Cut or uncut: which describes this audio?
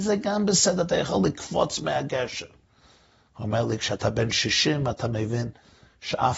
uncut